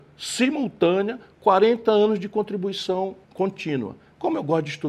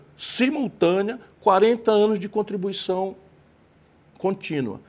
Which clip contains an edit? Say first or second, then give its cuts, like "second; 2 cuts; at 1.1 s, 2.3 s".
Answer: first; 1 cut; at 3.2 s